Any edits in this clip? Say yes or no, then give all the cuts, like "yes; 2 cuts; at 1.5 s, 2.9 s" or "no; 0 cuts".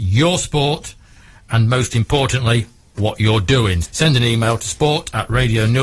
yes; 1 cut; at 3.8 s